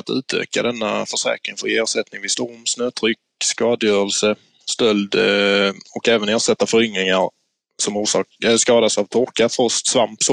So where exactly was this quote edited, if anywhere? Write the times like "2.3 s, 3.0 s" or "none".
none